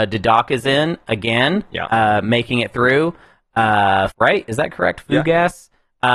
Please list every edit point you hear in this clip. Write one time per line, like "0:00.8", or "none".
0:04.1